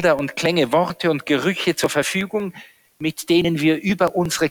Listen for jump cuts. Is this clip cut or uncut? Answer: uncut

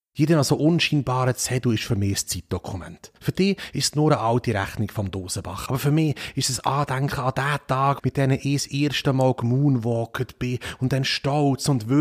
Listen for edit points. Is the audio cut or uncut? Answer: cut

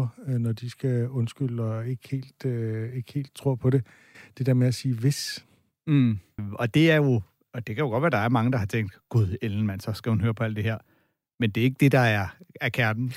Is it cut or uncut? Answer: cut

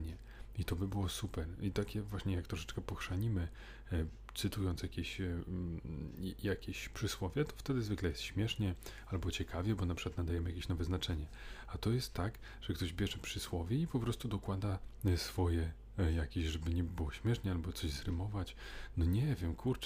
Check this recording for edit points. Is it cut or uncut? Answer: uncut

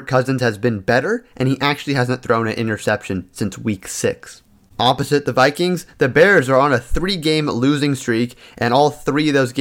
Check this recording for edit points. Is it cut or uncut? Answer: uncut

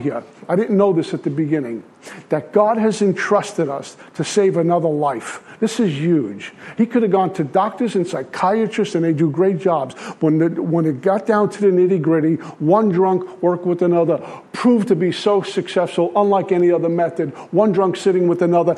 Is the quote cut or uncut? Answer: uncut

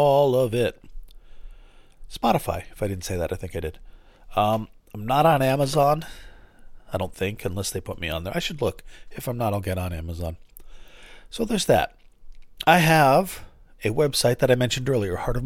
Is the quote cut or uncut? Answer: uncut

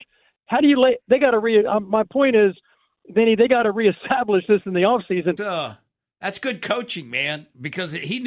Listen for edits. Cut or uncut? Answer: cut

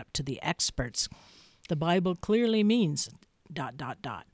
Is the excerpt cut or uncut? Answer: cut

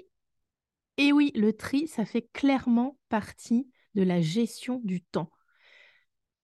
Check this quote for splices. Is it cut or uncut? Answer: uncut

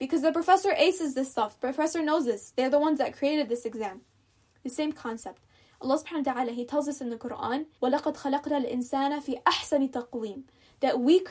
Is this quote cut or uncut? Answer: cut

